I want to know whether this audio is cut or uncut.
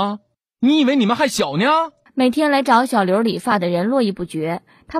cut